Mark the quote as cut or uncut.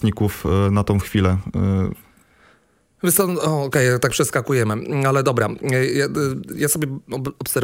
uncut